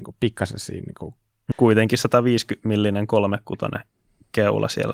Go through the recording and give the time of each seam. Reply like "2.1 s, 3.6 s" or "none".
1.5 s